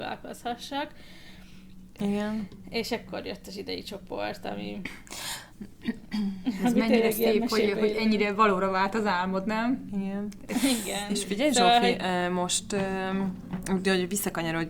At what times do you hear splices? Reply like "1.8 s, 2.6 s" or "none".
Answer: 2.0 s